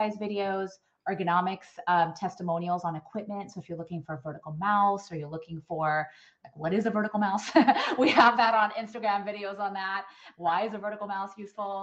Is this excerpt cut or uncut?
uncut